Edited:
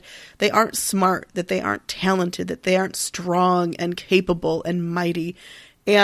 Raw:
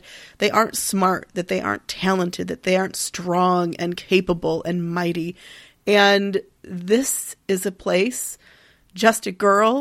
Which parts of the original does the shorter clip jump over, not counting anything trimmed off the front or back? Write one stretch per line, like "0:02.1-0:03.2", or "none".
none